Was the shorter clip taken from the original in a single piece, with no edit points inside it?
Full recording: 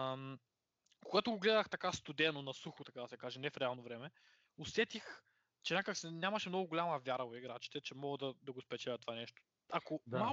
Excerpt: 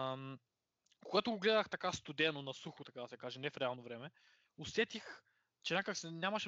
yes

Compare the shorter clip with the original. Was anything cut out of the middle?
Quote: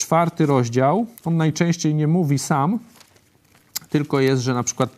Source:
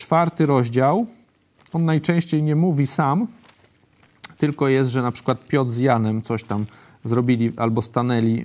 yes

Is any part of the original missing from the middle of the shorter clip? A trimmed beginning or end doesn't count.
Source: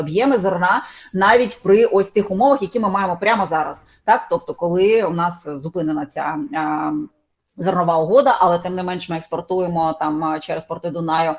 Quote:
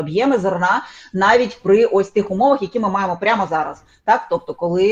no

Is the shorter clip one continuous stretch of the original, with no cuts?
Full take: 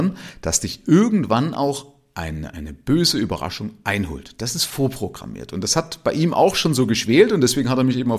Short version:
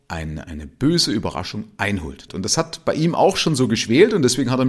no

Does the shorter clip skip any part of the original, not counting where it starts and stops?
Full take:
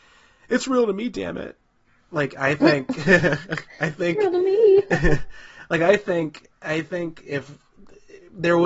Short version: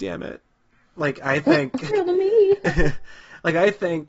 yes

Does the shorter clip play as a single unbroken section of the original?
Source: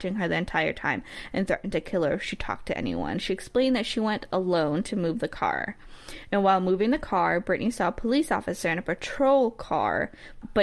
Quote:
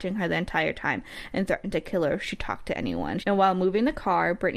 no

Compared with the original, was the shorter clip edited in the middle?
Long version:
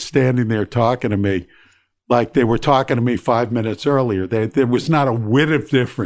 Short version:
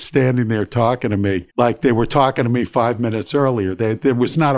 yes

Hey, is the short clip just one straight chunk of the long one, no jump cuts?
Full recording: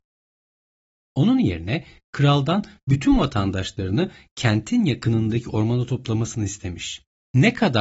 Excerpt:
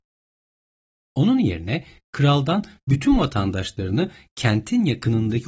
yes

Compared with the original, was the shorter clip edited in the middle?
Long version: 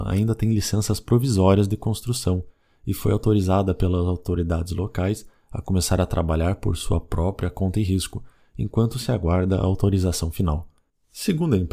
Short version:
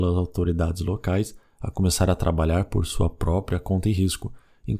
no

